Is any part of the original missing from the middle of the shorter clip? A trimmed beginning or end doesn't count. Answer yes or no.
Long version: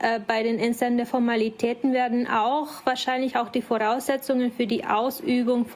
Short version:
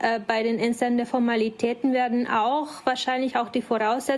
no